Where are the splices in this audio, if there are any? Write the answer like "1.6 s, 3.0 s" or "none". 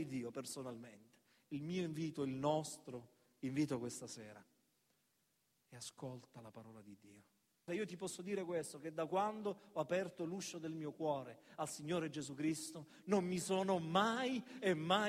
7.7 s